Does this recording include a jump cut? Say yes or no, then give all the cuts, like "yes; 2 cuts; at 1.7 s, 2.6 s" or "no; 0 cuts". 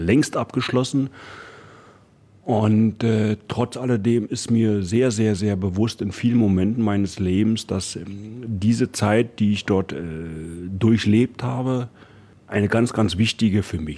no; 0 cuts